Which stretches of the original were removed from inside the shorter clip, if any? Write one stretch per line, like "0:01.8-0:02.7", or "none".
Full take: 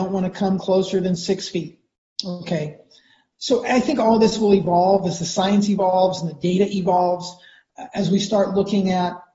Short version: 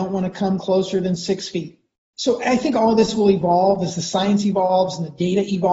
0:02.1-0:03.4